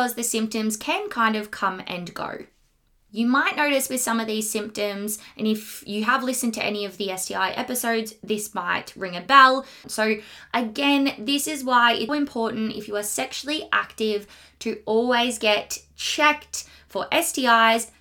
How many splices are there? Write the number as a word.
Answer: two